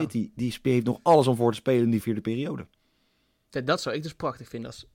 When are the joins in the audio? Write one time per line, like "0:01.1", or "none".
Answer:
0:02.0